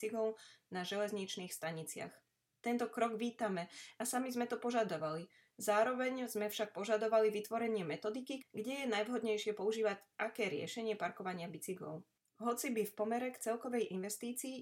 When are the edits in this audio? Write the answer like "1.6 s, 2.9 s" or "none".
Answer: 8.4 s